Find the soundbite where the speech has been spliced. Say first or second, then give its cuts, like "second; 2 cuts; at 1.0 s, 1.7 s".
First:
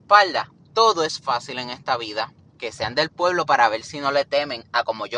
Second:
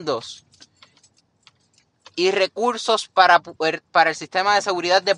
first; 1 cut; at 2.6 s